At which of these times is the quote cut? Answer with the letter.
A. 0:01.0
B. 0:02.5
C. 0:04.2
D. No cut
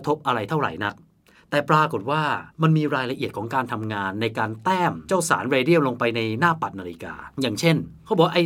B